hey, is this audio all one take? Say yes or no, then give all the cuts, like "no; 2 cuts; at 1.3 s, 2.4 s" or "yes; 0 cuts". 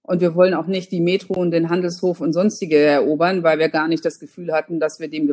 yes; 0 cuts